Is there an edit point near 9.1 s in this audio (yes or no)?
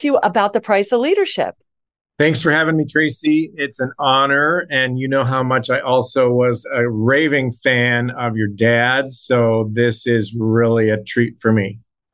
no